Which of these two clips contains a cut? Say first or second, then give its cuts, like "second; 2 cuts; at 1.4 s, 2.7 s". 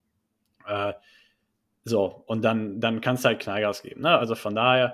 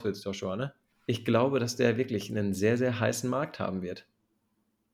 second; 1 cut; at 0.9 s